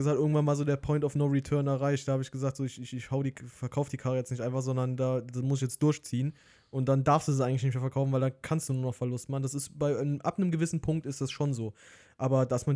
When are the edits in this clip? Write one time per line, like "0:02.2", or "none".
none